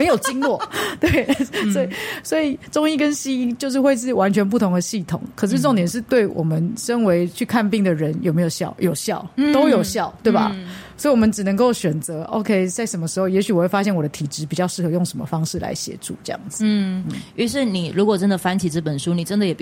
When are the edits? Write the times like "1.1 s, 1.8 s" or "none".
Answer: none